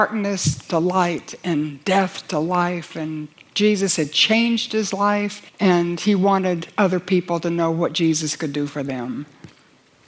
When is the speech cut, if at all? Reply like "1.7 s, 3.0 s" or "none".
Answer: 5.5 s